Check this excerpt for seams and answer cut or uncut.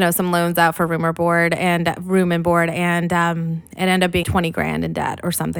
cut